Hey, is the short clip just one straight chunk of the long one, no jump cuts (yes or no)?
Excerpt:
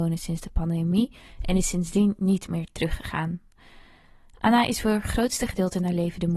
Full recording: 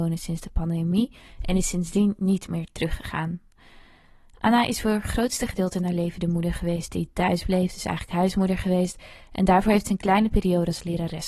yes